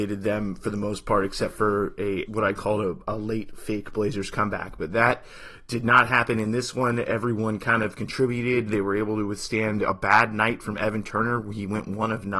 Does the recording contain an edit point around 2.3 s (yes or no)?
yes